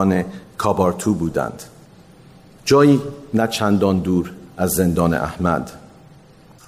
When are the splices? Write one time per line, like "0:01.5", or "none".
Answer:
none